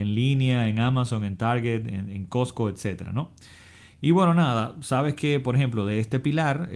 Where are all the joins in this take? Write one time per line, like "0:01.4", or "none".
none